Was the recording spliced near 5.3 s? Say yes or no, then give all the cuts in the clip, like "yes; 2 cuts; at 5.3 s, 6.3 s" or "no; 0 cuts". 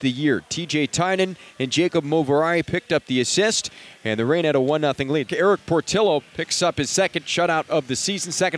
yes; 1 cut; at 5.3 s